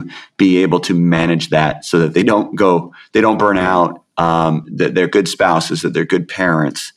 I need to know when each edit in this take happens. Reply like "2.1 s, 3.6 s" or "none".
none